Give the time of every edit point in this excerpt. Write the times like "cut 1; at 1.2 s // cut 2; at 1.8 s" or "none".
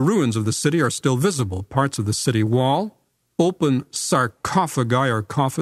cut 1; at 3.3 s